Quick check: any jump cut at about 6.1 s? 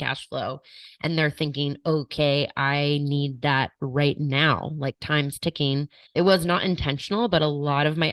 yes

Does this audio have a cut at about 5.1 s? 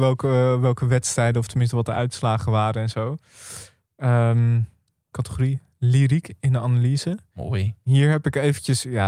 yes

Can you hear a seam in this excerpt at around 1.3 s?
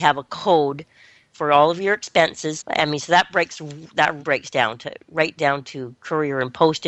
no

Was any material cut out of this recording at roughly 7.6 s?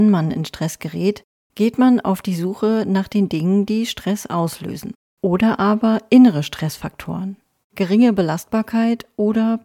yes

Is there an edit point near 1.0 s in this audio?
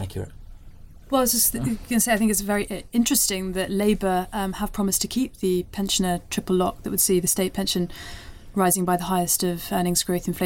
yes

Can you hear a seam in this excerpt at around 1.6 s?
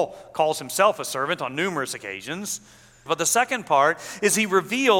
no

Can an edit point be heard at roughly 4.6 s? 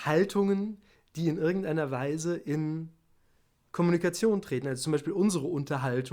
no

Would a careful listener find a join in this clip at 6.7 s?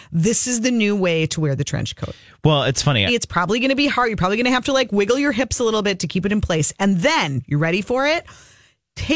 no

